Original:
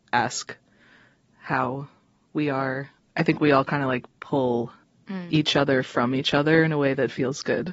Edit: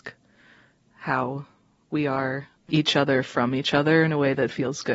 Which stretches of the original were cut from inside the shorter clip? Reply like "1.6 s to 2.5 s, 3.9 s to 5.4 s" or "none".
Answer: 3.1 s to 5.3 s

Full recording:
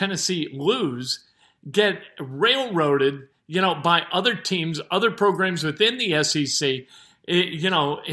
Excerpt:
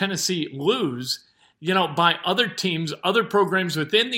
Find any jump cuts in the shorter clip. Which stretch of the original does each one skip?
1.5 s to 3.4 s

